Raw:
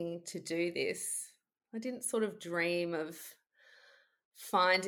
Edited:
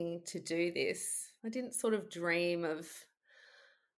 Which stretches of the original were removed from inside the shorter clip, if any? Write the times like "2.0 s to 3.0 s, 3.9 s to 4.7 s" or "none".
1.4 s to 1.7 s